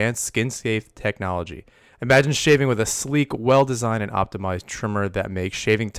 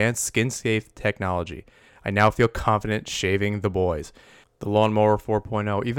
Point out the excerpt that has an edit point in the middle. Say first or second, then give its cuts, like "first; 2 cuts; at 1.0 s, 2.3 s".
first; 1 cut; at 1.9 s